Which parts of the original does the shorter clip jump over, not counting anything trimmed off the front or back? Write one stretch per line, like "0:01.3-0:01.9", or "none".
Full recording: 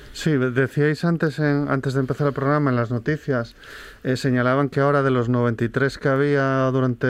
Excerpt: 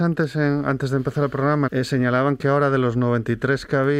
0:02.7-0:04.0